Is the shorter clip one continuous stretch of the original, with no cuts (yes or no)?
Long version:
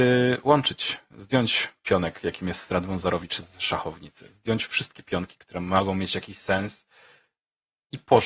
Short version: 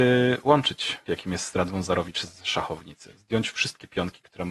no